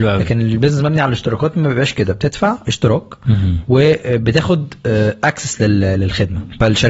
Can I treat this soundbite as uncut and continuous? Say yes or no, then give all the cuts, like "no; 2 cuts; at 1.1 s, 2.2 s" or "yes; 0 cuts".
yes; 0 cuts